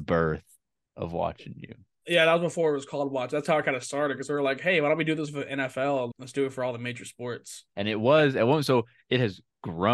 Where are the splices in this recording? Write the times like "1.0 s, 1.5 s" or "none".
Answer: 6.1 s, 7.7 s